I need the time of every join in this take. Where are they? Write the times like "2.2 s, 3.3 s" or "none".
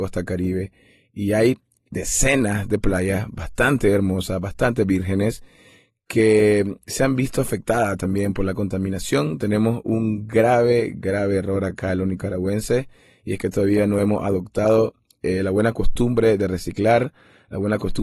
none